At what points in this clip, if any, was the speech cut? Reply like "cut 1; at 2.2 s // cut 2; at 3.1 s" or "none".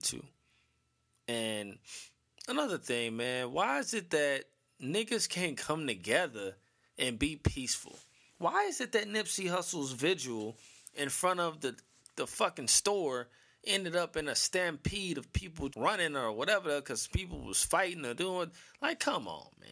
cut 1; at 15.7 s